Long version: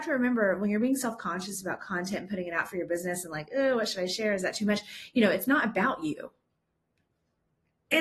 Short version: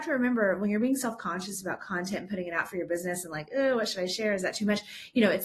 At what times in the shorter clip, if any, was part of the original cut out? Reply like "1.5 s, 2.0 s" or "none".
none